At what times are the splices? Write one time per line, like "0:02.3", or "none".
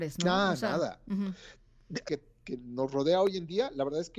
0:02.1